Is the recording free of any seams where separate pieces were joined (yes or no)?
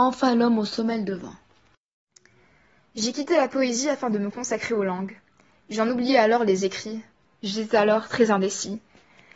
yes